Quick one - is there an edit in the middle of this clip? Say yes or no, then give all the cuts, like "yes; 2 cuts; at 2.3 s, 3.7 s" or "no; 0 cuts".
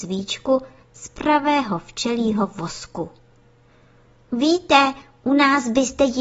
no; 0 cuts